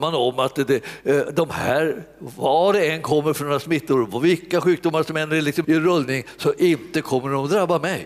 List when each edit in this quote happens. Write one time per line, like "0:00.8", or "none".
0:05.6